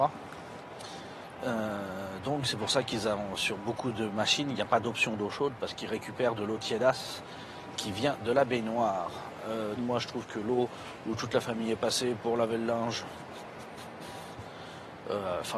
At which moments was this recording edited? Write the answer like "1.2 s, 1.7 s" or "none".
1.4 s, 9.8 s

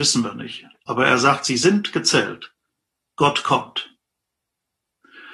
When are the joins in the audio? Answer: none

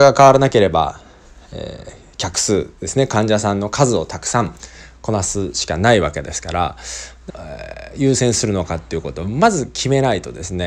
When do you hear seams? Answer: 7.3 s

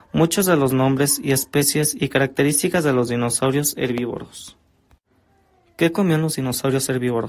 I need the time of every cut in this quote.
none

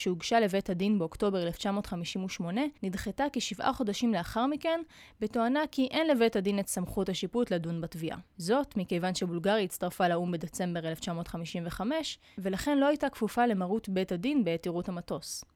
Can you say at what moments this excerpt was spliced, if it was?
2.8 s

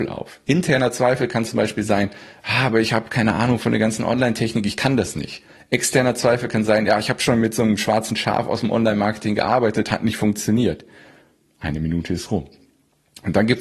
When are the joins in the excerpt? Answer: none

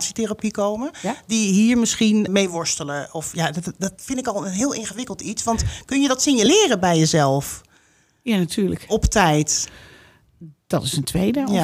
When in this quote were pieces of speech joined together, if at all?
2.3 s

